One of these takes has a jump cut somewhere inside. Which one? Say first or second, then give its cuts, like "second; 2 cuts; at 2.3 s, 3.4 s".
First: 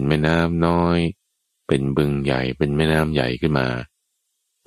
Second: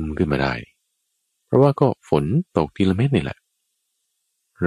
second; 1 cut; at 2.5 s